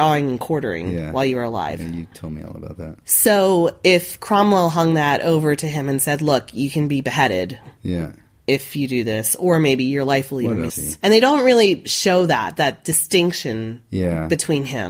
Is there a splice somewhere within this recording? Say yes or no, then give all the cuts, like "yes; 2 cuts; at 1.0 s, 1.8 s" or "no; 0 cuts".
yes; 2 cuts; at 2.1 s, 10.7 s